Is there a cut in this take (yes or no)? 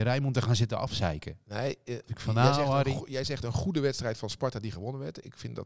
no